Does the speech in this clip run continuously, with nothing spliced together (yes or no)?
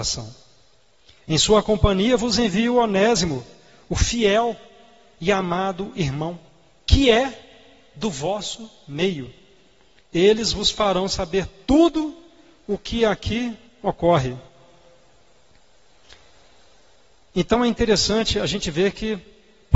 yes